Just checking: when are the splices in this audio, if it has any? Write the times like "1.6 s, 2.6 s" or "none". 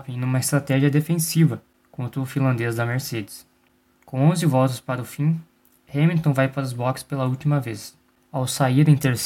none